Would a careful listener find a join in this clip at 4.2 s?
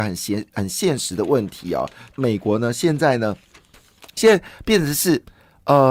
yes; 2 cuts; at 2.1 s, 4.2 s

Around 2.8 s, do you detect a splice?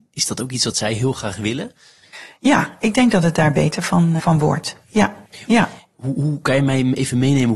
no; 2 cuts; at 4.2 s, 5.5 s

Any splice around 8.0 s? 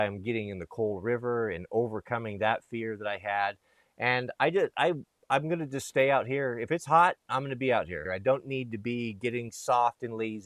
yes; 1 cut; at 8.0 s

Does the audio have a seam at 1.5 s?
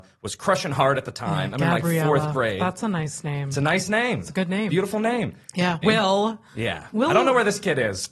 no; 1 cut; at 5.8 s

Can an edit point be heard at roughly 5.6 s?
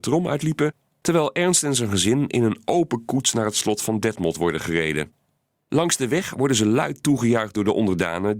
no; 0 cuts

